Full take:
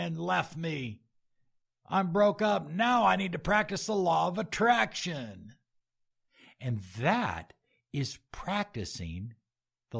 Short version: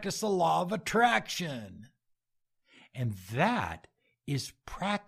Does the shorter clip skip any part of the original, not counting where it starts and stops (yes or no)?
no